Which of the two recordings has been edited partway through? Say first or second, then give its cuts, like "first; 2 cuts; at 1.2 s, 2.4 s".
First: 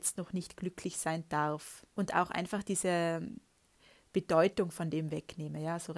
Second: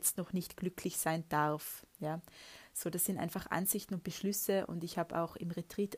first; 1 cut; at 1.9 s